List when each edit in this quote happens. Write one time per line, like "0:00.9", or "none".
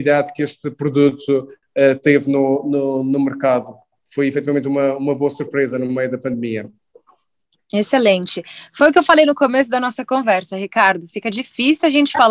none